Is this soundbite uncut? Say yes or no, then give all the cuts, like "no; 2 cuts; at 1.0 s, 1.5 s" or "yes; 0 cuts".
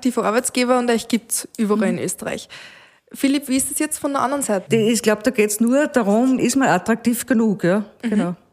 no; 2 cuts; at 4.7 s, 6.4 s